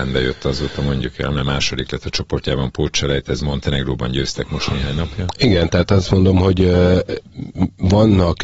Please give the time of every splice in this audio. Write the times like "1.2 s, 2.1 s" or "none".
none